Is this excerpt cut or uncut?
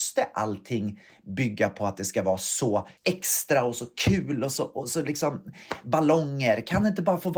cut